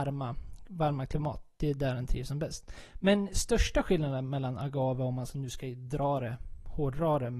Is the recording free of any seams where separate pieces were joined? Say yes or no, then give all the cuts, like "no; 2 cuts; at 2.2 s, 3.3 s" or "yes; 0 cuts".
yes; 0 cuts